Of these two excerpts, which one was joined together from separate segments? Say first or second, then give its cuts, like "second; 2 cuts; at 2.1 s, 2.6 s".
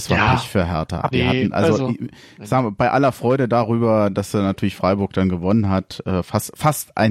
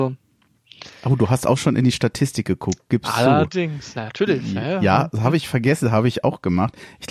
first; 1 cut; at 1.1 s